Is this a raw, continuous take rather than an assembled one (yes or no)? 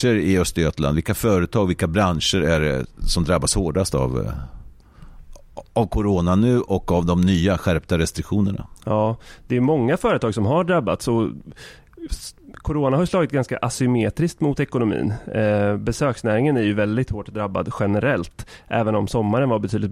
yes